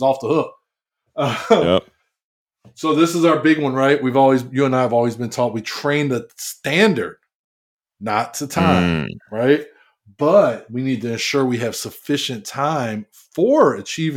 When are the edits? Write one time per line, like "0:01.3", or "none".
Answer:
none

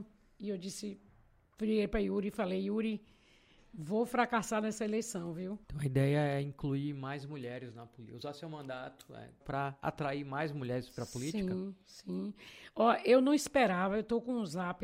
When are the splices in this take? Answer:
0:05.6
0:09.4

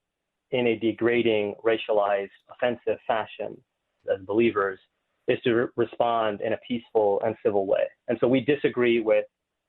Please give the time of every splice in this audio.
0:04.0

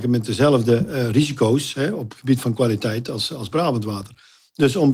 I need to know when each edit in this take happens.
none

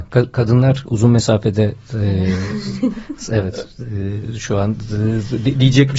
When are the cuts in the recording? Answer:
none

